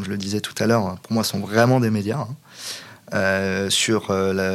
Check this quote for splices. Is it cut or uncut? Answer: uncut